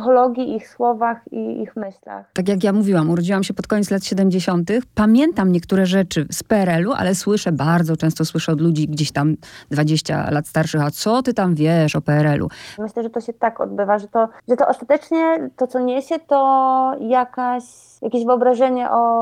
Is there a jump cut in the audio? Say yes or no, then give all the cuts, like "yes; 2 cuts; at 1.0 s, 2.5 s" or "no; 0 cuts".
yes; 2 cuts; at 2.3 s, 12.8 s